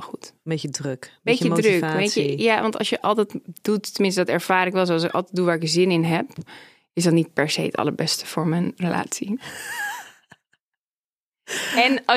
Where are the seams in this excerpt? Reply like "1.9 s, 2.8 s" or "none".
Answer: none